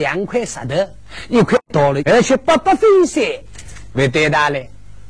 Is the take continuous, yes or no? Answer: no